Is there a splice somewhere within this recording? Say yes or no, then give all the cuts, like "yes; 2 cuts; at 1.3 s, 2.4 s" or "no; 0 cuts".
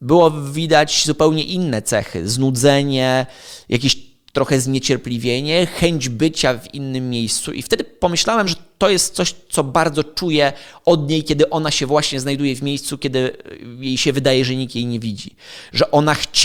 no; 0 cuts